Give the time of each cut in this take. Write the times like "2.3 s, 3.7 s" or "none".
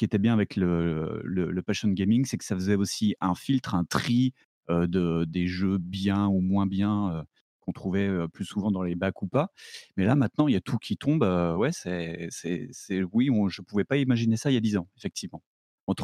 none